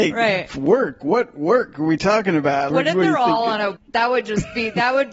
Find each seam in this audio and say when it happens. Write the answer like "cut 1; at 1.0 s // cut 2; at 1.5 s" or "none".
cut 1; at 2.7 s // cut 2; at 3.8 s